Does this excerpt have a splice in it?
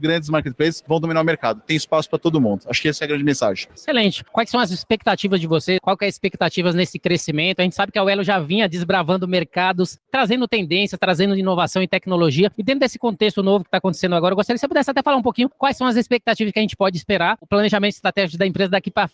yes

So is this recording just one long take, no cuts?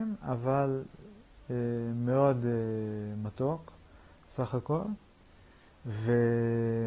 yes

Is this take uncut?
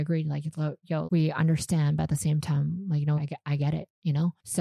no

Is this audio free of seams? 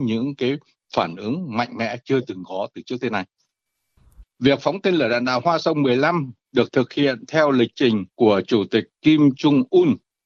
no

